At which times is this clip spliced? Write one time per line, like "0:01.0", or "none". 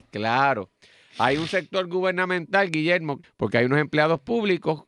0:03.2